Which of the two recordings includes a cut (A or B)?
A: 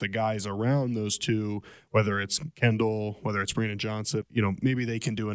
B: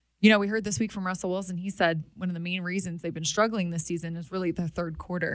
A